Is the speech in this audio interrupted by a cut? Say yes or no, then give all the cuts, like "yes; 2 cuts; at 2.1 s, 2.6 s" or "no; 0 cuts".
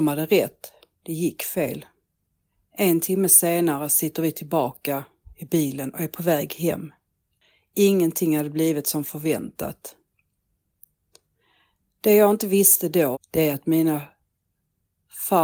yes; 1 cut; at 13.1 s